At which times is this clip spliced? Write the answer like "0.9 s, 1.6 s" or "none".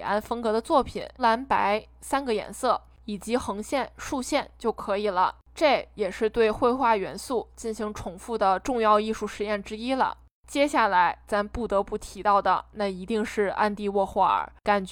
1.2 s